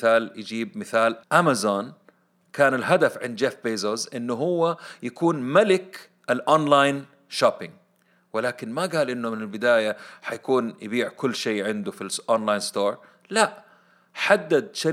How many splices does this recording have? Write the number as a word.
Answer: one